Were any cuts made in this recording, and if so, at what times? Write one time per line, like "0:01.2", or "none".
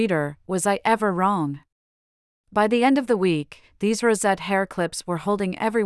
none